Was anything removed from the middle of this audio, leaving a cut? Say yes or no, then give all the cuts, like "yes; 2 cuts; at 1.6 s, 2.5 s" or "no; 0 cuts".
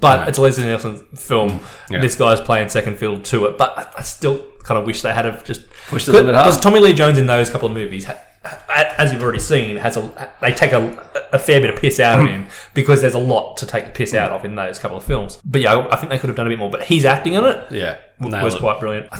no; 0 cuts